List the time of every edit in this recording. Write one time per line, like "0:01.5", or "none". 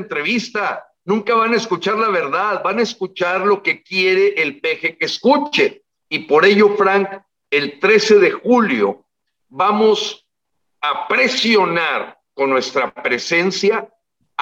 0:06.0